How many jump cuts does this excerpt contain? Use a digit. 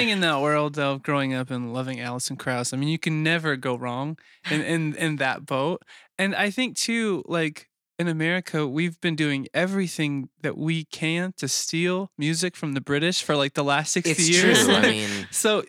0